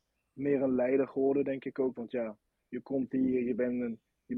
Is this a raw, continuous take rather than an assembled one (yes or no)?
yes